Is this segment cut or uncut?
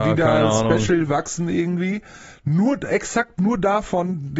uncut